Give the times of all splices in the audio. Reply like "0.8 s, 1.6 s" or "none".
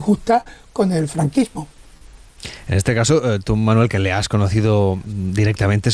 none